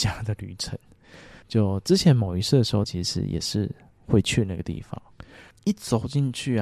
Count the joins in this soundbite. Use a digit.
3